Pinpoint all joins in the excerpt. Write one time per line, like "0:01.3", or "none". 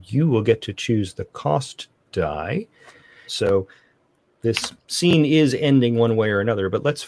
0:03.3